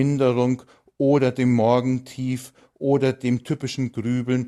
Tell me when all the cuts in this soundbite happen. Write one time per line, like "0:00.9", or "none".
none